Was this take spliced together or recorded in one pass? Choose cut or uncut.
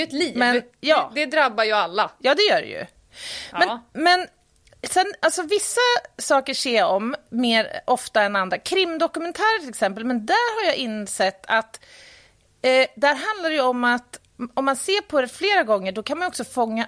uncut